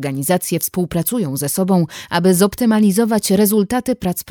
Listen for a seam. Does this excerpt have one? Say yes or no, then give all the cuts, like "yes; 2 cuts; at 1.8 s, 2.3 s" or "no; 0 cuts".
no; 0 cuts